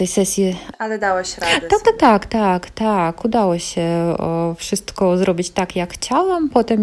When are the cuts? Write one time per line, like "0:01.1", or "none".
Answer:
none